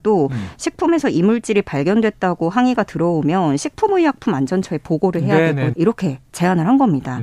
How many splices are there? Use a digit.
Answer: 1